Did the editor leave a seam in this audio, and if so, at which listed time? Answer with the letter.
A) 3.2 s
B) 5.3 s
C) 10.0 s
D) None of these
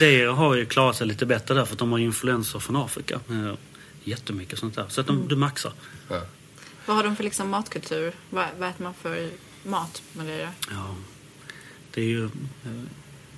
A